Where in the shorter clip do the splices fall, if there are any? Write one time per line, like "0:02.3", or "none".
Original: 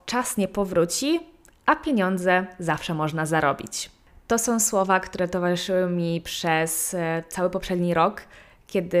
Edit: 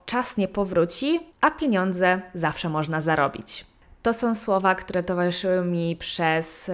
0:01.3